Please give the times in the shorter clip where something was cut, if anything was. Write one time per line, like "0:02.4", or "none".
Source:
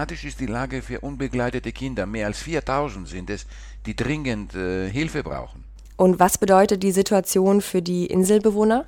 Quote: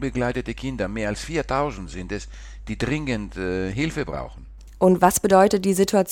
none